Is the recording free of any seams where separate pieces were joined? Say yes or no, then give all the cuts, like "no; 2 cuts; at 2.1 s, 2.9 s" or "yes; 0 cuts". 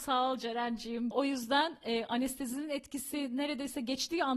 no; 1 cut; at 1.1 s